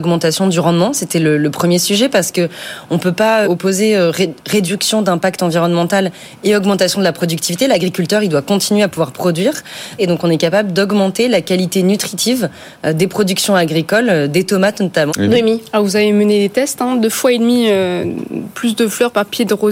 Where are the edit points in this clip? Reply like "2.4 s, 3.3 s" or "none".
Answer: 3.4 s, 10.0 s, 15.1 s

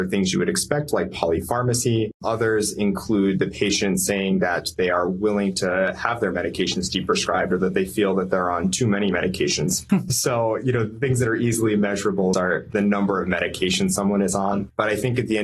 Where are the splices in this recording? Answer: 9.9 s, 12.3 s

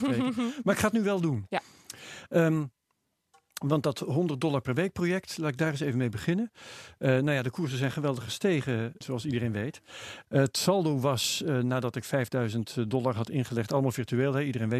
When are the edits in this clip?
9.0 s, 10.2 s

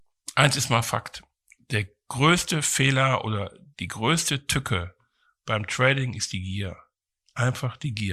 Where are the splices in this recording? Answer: none

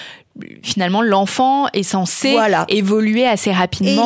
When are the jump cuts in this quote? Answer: none

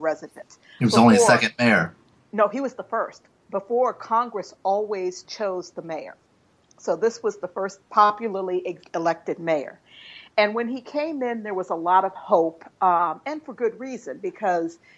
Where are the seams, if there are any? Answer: none

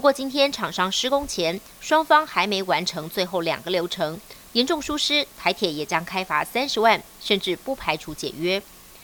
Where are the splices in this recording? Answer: 4.5 s

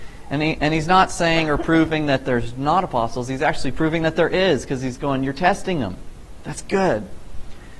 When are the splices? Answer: none

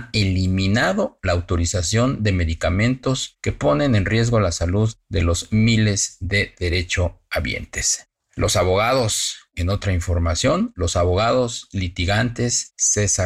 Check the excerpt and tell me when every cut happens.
none

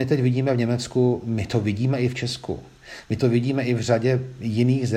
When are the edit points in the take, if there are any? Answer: none

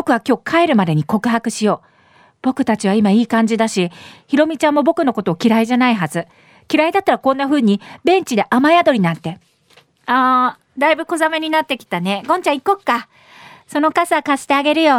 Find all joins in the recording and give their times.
none

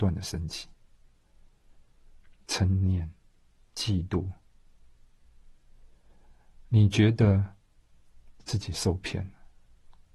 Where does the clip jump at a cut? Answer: 2.4 s

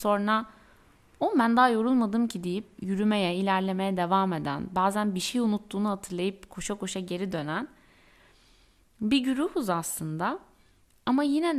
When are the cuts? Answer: none

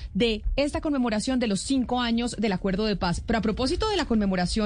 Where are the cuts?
none

